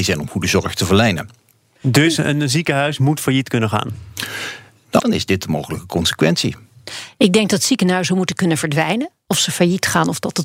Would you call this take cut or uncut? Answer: cut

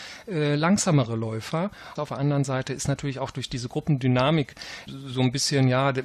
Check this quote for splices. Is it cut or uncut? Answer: cut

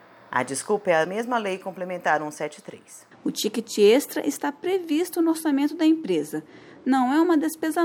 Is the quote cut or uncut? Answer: cut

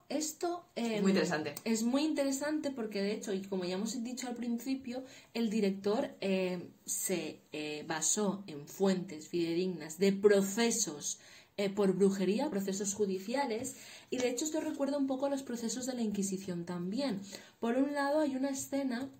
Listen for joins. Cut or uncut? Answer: uncut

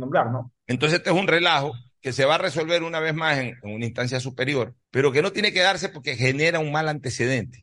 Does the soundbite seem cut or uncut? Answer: cut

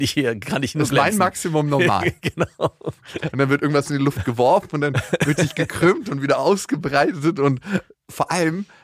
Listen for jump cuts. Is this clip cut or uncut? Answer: cut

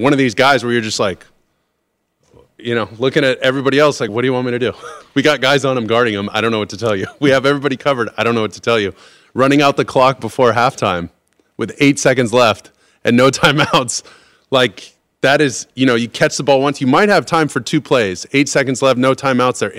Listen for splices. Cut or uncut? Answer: cut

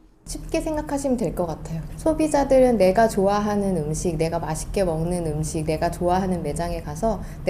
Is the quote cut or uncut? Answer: cut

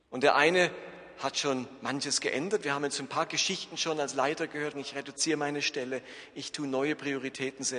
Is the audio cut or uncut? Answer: cut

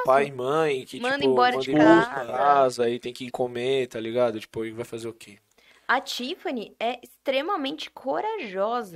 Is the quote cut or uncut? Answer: cut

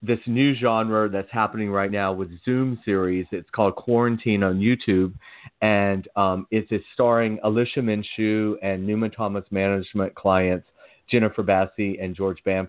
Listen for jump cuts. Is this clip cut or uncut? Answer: uncut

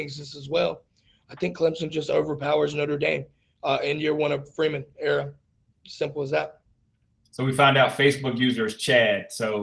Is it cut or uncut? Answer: uncut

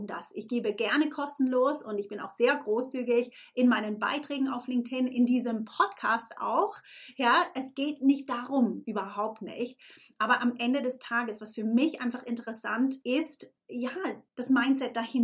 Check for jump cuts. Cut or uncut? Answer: cut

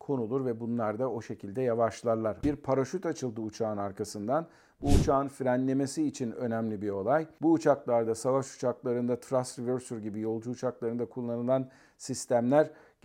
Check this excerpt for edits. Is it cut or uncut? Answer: cut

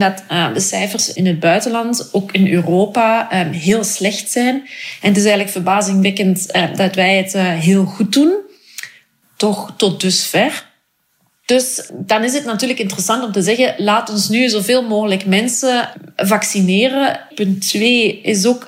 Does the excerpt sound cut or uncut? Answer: uncut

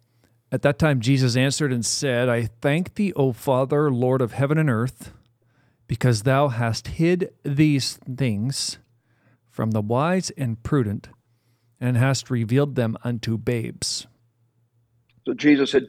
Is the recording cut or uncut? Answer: uncut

